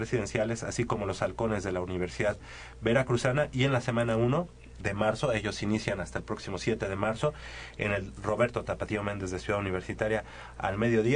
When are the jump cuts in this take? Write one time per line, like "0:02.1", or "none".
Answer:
0:04.8